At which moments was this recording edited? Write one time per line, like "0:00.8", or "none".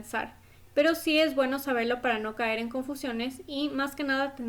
none